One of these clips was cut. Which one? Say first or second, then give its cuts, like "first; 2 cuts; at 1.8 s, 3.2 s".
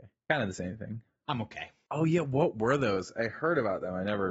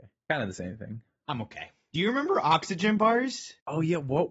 first; 1 cut; at 1.9 s